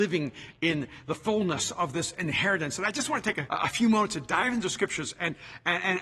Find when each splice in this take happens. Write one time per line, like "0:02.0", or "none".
0:03.5